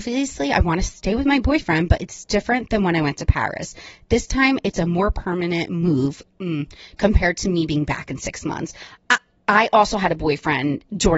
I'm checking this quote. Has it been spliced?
yes; 1 cut; at 9.0 s

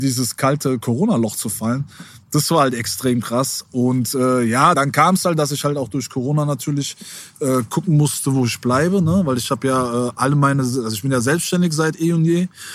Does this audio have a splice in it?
yes; 1 cut; at 4.7 s

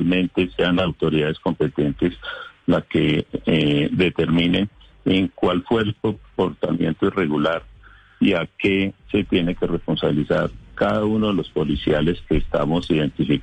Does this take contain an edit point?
no; 0 cuts

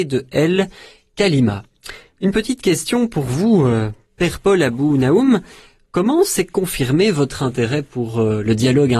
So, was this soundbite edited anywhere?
no; 0 cuts

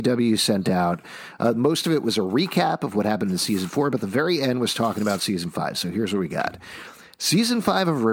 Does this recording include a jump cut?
no; 0 cuts

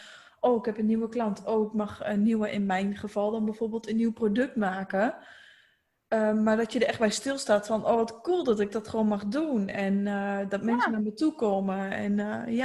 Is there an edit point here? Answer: no; 0 cuts

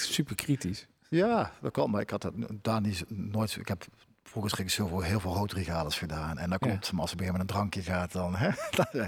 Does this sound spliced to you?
no; 0 cuts

